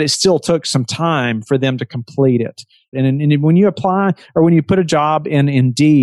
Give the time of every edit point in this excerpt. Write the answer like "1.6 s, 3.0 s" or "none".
2.9 s